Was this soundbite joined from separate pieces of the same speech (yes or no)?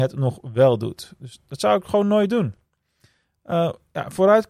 no